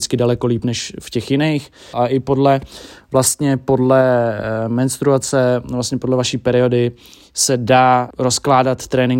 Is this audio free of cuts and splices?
no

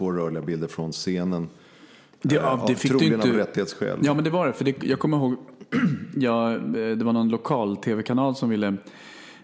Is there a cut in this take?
no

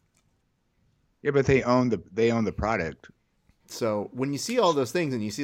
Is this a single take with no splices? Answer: no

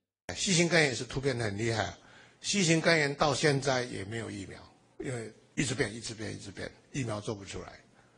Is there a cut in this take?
no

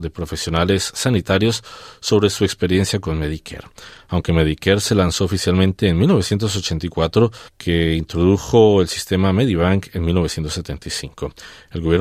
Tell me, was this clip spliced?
yes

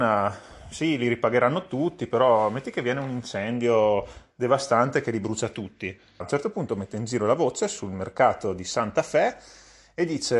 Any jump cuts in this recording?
yes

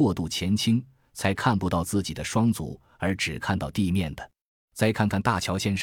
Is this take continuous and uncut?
no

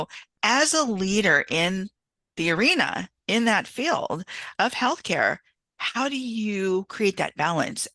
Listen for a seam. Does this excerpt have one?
no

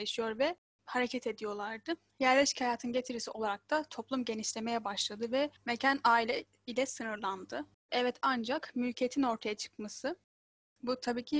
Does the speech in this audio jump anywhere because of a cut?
yes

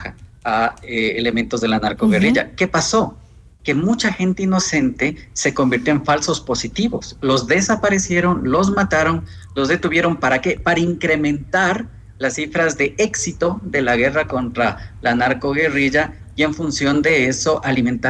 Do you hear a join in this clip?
no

